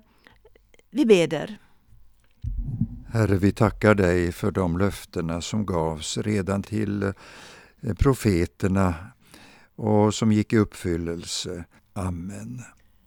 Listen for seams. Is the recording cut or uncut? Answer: cut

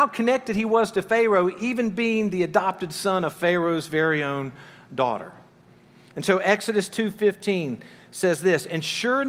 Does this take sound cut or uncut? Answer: uncut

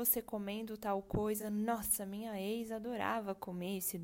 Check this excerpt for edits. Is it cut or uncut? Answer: uncut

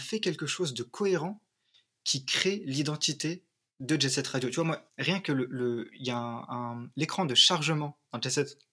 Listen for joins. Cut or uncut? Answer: cut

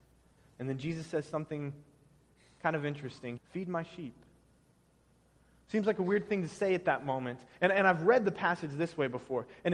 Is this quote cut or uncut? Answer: cut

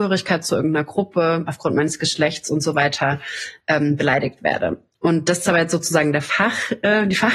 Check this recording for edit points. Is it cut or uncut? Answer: uncut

